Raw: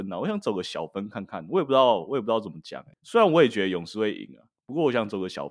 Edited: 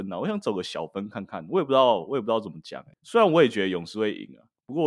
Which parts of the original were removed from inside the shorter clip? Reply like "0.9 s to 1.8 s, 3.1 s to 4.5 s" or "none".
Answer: none

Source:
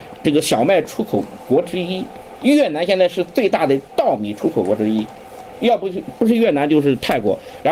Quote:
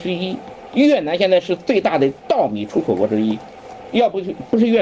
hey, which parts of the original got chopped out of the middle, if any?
none

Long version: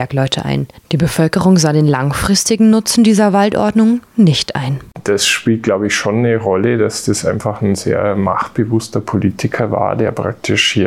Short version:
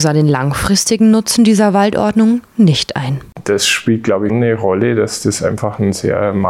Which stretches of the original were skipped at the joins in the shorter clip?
5.9 s to 6.1 s

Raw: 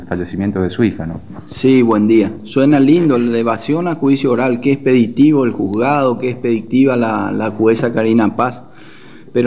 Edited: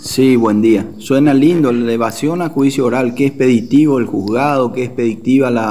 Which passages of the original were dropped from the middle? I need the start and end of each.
none

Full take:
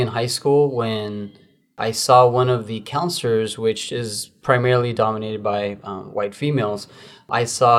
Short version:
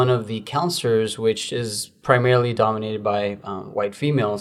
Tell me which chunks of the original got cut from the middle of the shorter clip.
none

